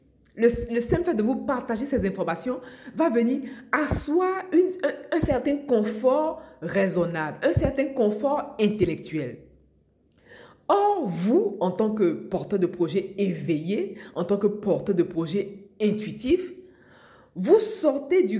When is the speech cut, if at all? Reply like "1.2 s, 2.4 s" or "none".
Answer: none